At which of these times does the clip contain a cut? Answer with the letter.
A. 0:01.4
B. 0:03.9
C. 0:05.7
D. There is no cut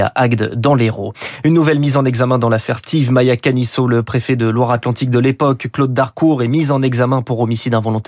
D